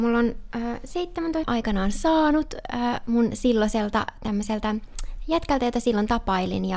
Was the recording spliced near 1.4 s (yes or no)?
yes